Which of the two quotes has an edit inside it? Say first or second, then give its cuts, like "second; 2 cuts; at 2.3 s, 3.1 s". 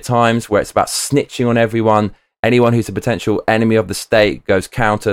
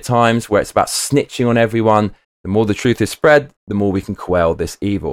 second; 2 cuts; at 2.2 s, 3.6 s